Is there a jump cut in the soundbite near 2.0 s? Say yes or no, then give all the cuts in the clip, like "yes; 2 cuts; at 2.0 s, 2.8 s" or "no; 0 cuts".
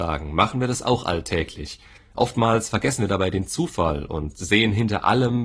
yes; 1 cut; at 2.0 s